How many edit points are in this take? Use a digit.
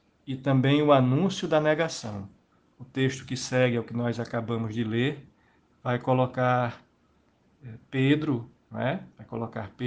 0